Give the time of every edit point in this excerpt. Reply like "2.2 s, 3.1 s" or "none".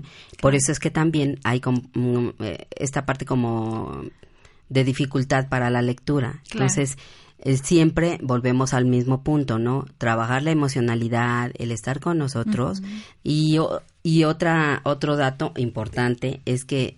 13.2 s

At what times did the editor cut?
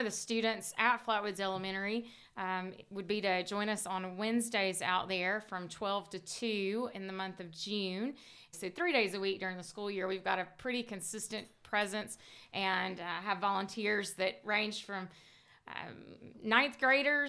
8.5 s

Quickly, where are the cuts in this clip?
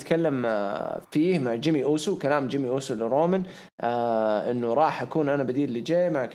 none

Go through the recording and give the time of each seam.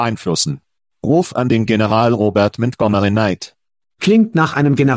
3.8 s

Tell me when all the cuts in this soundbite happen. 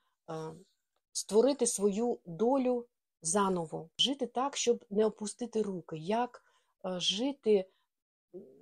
3.9 s

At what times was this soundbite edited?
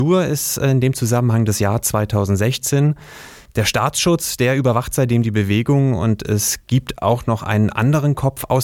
3.5 s

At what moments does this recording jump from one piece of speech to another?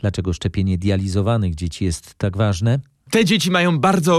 none

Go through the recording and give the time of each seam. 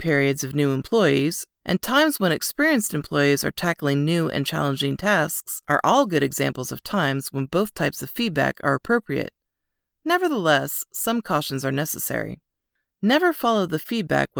1.6 s

